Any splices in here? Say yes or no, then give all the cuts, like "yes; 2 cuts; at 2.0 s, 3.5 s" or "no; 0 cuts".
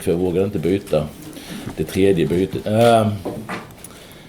yes; 1 cut; at 2.6 s